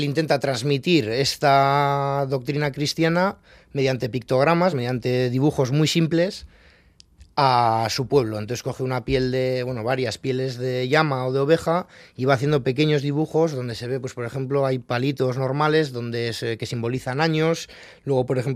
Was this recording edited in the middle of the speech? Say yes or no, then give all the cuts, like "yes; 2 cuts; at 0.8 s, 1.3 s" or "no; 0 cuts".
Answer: no; 0 cuts